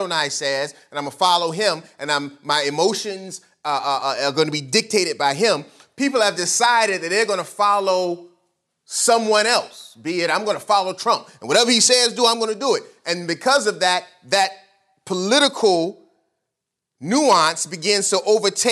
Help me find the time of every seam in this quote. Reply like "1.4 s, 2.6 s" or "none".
none